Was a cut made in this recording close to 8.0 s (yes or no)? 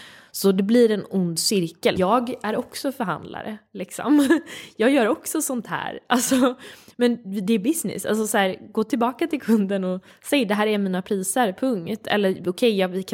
no